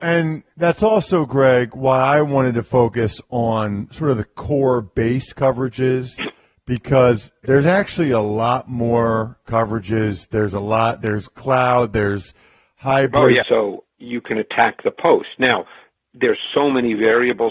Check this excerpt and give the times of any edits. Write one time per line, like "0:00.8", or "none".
0:13.4